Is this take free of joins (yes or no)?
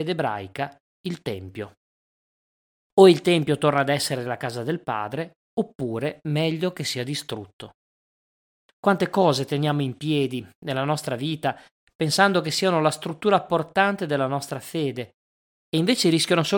yes